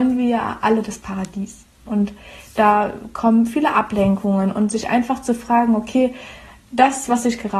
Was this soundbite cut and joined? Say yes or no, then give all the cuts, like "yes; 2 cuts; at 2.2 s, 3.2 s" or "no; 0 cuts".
yes; 1 cut; at 1.9 s